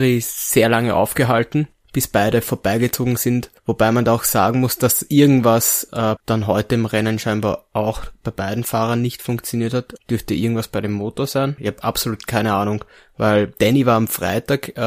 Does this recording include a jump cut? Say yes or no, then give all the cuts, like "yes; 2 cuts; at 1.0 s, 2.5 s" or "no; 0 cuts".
yes; 3 cuts; at 3.6 s, 6.2 s, 11.6 s